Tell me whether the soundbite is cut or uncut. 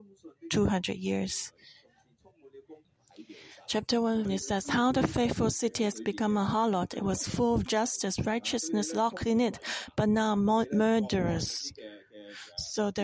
cut